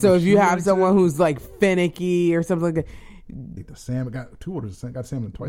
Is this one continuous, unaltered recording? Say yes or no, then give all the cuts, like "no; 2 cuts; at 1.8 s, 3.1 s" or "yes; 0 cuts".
no; 1 cut; at 3.6 s